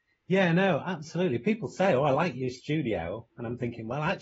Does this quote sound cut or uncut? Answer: uncut